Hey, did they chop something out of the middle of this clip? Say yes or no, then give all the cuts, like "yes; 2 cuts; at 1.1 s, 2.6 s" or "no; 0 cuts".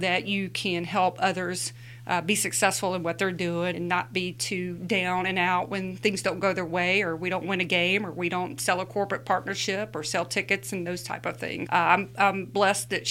yes; 2 cuts; at 3.7 s, 11.7 s